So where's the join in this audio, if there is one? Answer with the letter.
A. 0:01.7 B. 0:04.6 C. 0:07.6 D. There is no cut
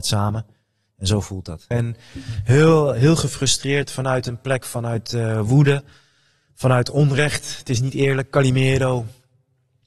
A